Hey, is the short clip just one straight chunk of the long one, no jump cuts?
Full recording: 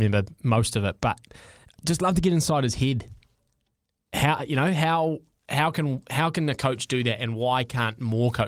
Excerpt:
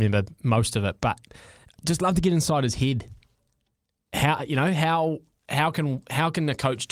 yes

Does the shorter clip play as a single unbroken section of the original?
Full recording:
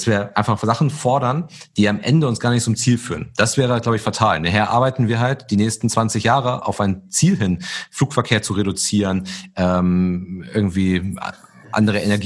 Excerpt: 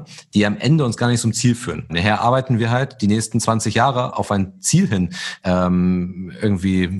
no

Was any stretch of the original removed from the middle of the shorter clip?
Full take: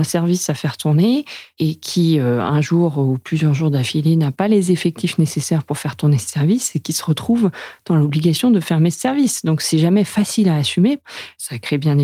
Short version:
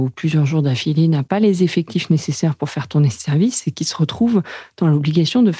no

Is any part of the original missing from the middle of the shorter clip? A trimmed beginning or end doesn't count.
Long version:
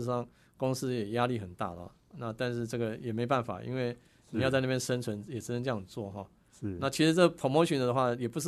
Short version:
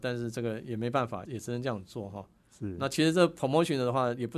yes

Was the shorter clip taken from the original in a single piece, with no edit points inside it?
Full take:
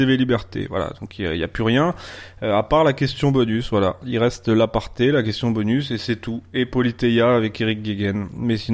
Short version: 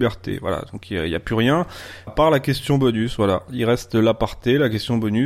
no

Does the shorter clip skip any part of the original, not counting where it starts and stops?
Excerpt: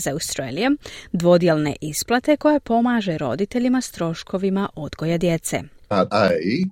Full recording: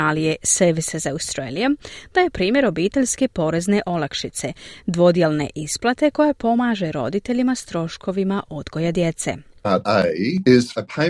yes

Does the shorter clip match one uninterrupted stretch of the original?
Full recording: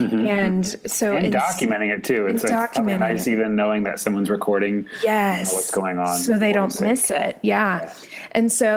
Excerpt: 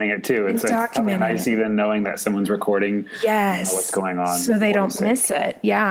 yes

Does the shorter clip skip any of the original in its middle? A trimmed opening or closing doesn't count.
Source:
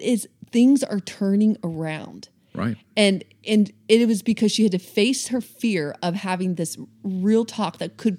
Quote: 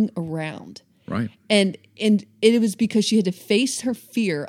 no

